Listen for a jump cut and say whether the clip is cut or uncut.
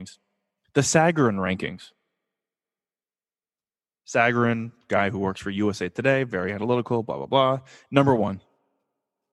uncut